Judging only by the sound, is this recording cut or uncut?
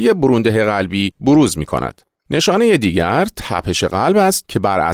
uncut